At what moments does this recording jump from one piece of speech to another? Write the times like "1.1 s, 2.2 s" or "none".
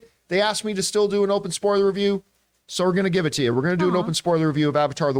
none